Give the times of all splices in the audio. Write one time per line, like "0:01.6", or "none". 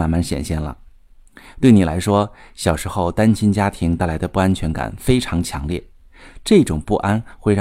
none